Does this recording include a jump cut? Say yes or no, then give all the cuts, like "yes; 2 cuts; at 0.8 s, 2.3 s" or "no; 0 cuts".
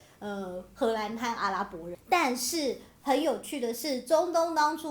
no; 0 cuts